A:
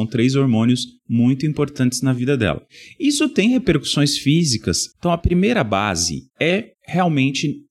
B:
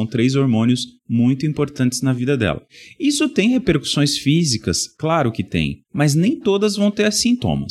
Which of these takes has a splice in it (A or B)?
A